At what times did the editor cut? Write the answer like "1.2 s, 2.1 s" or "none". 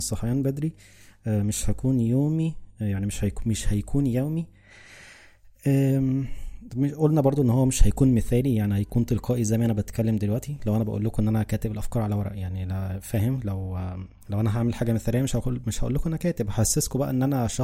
none